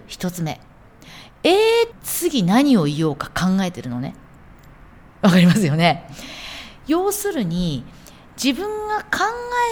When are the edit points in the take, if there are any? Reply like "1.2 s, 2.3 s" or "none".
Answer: 1.9 s